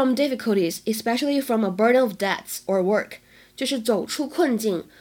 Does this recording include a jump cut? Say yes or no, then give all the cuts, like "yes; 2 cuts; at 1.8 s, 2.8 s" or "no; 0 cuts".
no; 0 cuts